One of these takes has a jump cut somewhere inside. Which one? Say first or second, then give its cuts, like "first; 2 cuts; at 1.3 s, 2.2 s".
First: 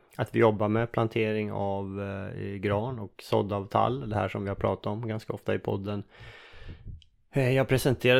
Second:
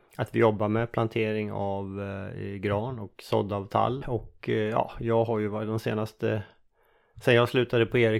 second; 1 cut; at 4.0 s